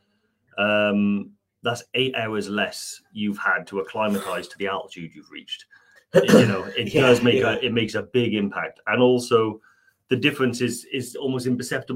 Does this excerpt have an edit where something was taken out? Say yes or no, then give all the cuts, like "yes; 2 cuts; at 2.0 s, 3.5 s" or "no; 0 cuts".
yes; 1 cut; at 6.0 s